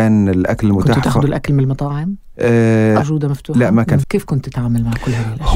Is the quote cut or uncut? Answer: cut